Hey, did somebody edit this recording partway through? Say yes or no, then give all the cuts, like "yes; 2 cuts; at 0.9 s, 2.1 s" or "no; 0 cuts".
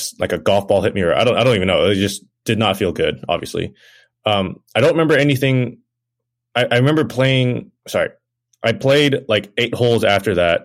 no; 0 cuts